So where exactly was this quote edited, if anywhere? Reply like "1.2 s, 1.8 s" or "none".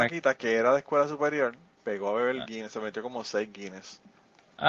none

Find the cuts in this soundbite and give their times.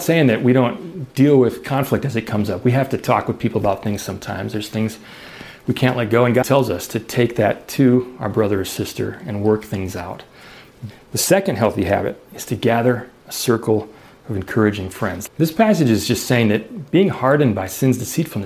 6.4 s, 10.9 s, 15.3 s

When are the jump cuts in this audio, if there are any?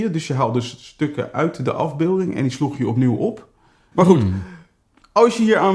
3.9 s

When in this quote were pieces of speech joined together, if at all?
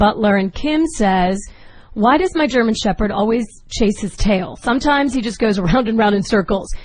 none

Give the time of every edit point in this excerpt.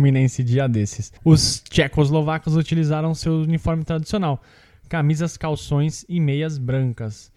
1.2 s

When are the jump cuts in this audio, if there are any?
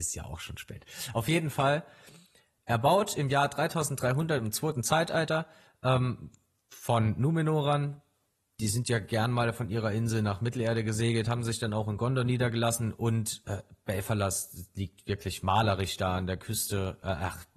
none

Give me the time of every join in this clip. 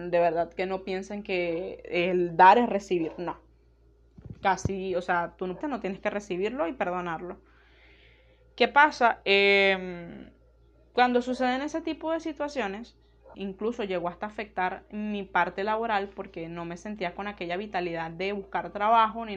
5.6 s, 13.3 s

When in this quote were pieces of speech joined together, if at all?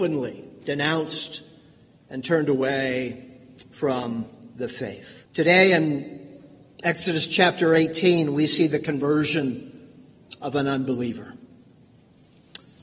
5.3 s

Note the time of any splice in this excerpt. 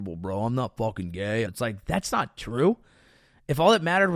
1.5 s

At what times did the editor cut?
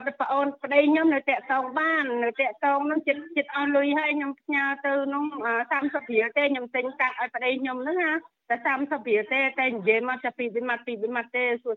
none

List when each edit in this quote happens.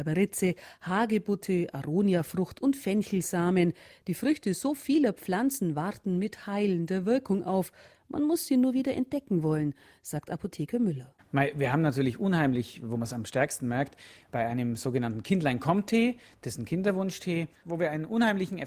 none

